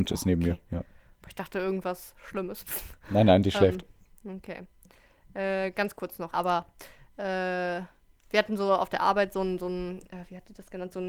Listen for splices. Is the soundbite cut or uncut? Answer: cut